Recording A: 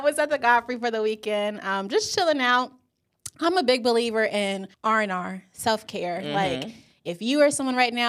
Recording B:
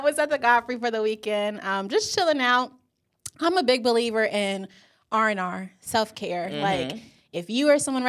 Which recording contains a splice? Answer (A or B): A